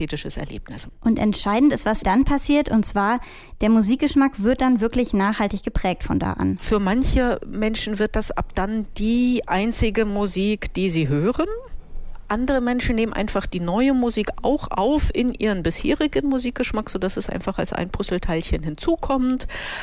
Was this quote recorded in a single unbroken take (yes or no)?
no